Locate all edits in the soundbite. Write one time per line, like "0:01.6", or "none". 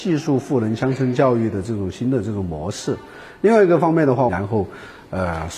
0:04.3